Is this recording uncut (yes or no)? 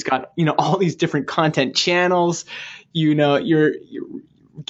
yes